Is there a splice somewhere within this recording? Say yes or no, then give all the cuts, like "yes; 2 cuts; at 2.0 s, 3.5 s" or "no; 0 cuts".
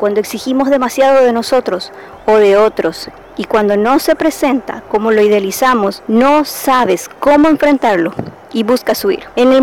no; 0 cuts